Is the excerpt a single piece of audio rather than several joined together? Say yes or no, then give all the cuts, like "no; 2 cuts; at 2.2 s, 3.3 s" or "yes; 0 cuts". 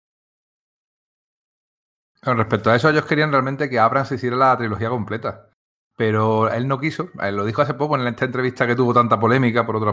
yes; 0 cuts